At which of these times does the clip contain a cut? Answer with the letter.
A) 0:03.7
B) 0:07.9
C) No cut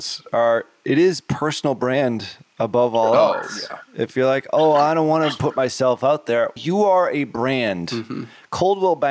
C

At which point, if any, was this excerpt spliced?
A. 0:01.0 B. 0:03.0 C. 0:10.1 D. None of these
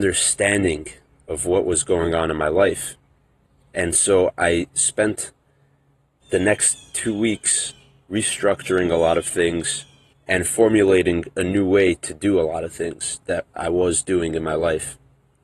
C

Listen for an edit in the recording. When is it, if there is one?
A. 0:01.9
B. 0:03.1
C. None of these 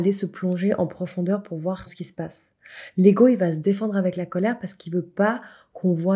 A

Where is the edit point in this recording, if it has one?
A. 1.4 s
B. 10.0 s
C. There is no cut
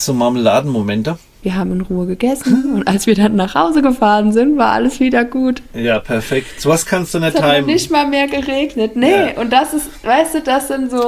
A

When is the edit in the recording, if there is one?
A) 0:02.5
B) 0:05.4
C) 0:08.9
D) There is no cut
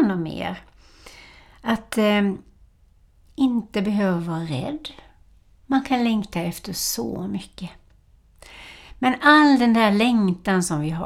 D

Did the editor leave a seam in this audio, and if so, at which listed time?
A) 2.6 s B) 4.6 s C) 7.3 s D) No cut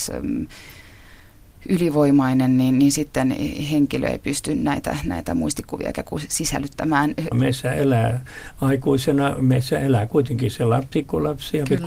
C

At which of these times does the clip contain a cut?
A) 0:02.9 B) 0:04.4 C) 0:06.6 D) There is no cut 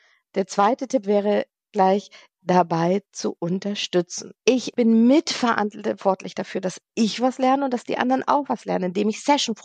B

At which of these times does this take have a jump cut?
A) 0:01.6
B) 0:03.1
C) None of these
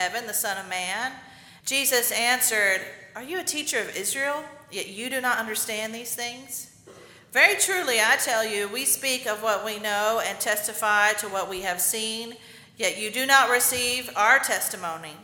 A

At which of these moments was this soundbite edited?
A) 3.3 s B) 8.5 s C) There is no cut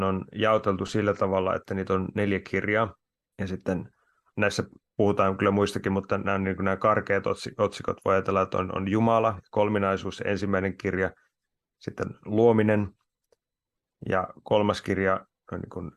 A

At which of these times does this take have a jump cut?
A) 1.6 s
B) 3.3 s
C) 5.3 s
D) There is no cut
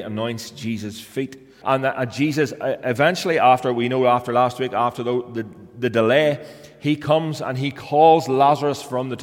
A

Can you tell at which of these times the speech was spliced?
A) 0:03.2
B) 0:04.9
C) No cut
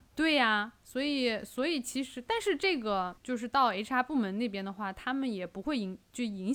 A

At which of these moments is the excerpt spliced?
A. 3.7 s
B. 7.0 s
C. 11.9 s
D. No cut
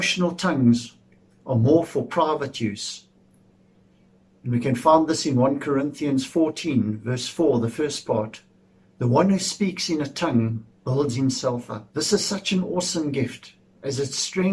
C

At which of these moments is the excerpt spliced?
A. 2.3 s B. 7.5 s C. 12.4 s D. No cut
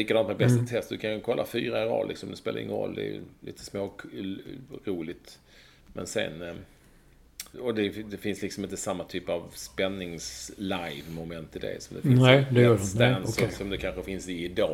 B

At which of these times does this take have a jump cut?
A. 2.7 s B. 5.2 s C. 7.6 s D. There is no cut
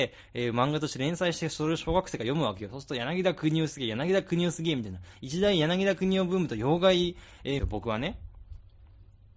C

